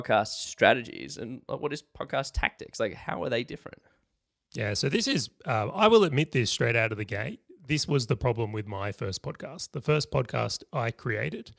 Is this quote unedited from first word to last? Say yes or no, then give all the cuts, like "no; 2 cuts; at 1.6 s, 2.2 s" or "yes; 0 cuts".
yes; 0 cuts